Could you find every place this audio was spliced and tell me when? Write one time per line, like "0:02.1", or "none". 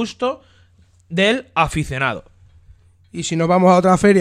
none